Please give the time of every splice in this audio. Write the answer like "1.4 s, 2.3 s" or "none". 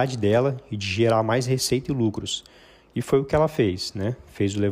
none